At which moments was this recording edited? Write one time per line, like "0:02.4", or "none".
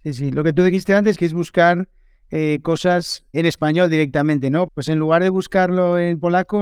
0:01.1
0:03.3
0:04.7